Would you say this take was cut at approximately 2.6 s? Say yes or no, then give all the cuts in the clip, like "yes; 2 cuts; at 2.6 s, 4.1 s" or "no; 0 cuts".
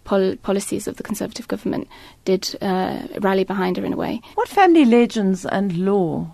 no; 1 cut; at 4.3 s